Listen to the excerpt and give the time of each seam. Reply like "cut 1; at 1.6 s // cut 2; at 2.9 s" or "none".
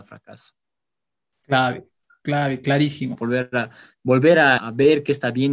cut 1; at 3.1 s // cut 2; at 4.6 s